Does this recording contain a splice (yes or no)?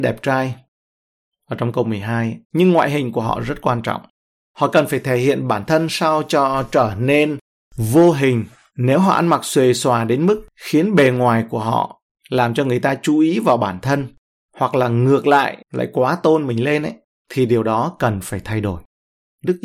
yes